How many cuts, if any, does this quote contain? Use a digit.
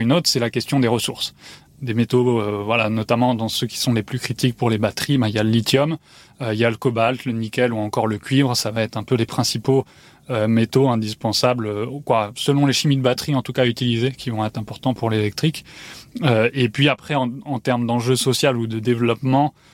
1